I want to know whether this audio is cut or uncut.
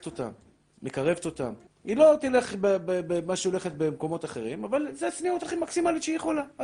cut